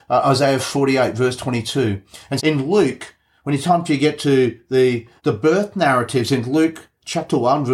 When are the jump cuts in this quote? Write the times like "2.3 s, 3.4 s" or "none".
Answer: 2.4 s, 5.2 s